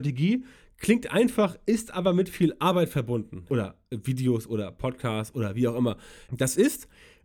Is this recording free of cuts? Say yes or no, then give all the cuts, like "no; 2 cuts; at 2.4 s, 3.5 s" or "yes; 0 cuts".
no; 2 cuts; at 3.5 s, 6.2 s